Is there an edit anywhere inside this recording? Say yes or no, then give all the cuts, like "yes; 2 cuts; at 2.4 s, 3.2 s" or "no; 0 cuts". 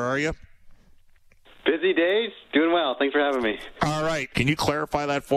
yes; 1 cut; at 4.3 s